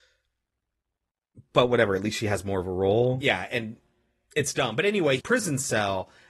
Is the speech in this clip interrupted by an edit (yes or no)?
yes